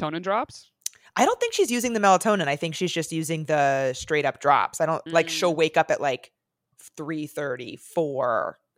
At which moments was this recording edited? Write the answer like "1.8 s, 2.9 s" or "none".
5.1 s

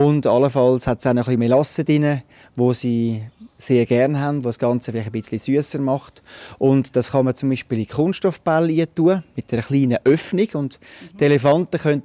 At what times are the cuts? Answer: none

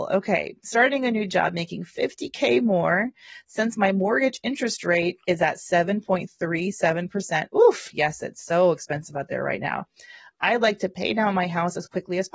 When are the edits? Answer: none

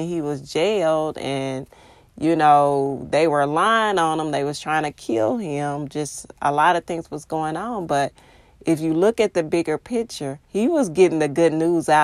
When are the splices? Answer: 10.4 s

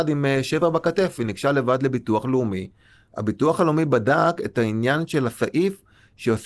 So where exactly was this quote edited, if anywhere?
none

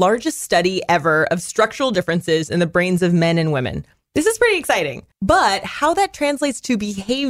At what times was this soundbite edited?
5.1 s

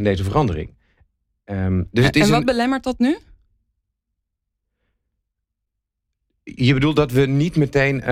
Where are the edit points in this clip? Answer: none

